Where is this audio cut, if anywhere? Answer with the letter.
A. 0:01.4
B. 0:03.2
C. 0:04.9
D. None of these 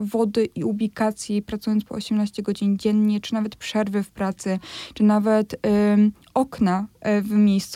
D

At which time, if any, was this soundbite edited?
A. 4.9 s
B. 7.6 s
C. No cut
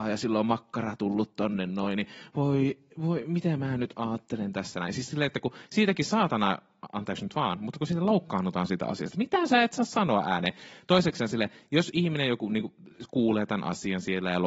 C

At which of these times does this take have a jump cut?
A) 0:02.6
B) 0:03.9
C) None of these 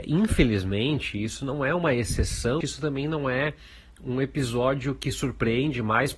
A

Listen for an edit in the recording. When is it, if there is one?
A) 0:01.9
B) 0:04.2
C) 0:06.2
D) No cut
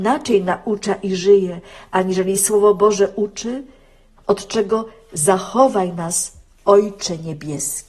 B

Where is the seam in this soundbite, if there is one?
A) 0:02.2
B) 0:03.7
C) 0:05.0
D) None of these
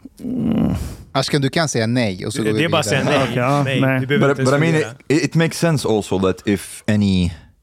D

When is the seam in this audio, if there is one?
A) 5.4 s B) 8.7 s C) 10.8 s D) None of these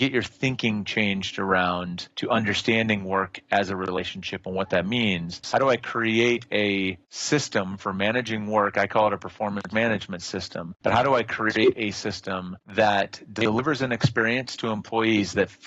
A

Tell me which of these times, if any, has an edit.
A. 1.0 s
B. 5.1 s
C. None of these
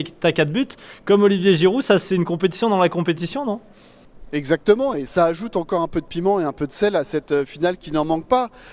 B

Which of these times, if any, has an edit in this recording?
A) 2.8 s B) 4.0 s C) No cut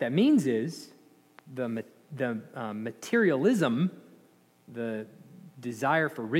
C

